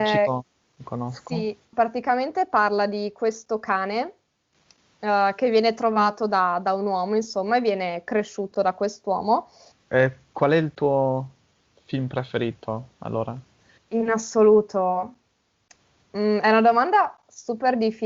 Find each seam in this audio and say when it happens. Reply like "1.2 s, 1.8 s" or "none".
1.7 s, 9.7 s, 13.8 s

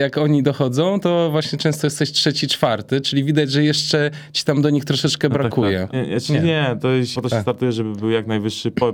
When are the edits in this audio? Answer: 5.9 s, 7.1 s

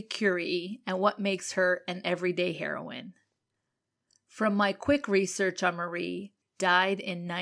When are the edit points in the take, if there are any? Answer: 6.4 s

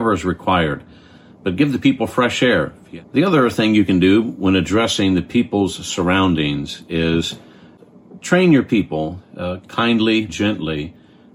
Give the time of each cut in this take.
10.3 s

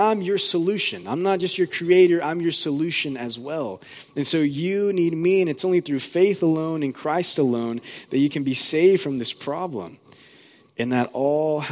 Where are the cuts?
none

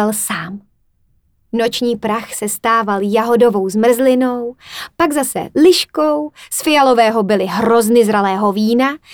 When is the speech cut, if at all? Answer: none

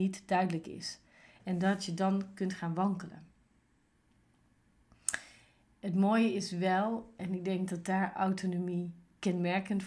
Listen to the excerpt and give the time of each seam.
none

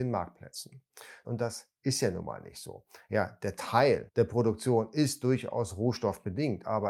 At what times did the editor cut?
1.2 s

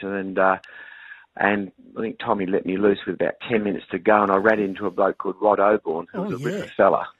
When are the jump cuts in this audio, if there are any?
none

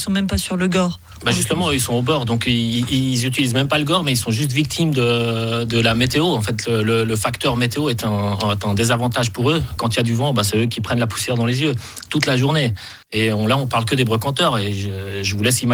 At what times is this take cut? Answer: 9.8 s, 13.0 s

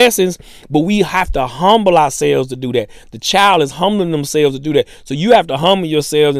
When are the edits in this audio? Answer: none

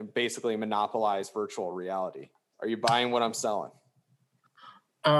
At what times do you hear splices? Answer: 2.5 s

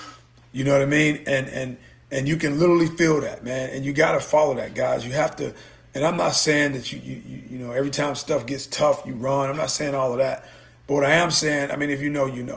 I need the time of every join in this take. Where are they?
none

